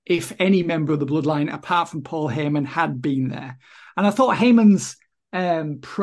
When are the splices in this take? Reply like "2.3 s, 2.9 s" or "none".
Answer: none